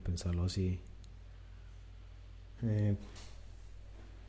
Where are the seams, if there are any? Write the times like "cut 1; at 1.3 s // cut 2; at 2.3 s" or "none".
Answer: cut 1; at 2.6 s